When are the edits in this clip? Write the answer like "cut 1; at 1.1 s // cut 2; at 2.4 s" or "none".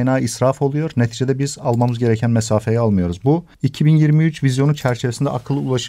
cut 1; at 3.5 s